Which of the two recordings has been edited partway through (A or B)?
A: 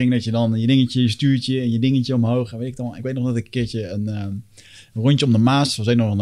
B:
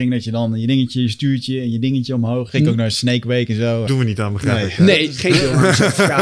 B